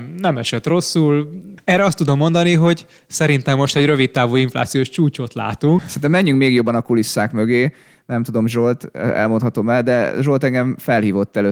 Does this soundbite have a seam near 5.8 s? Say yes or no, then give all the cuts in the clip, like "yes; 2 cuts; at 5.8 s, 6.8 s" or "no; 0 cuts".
yes; 2 cuts; at 1.6 s, 5.8 s